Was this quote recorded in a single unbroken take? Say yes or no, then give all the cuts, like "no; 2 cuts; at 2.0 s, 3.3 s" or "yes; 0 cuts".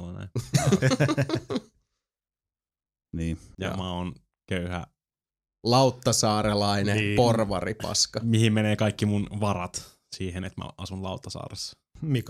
no; 1 cut; at 3.5 s